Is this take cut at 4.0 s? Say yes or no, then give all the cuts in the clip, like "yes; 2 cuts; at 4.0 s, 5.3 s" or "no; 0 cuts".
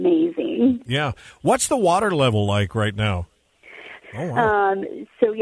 yes; 1 cut; at 4.0 s